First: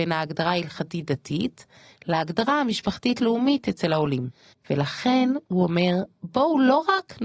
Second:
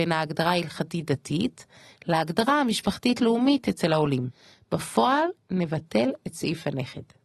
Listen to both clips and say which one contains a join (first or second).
first